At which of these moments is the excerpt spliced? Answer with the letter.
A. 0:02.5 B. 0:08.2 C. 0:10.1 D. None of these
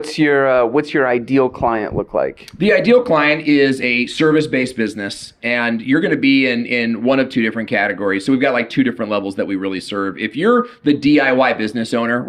D